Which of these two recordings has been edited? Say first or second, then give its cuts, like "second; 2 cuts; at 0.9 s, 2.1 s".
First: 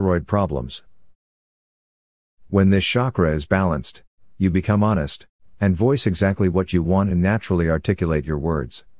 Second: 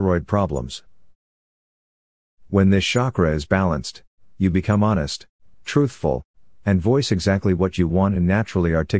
first; 1 cut; at 5.5 s